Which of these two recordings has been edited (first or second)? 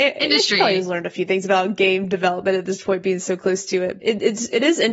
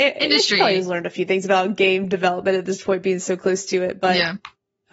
first